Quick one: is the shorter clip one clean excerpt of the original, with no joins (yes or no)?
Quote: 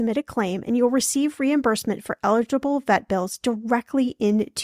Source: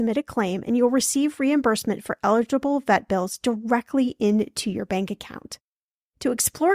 yes